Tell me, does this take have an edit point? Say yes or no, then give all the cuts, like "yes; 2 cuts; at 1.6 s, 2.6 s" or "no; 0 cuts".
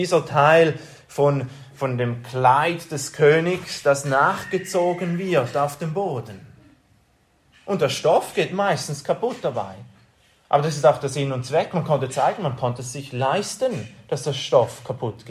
no; 0 cuts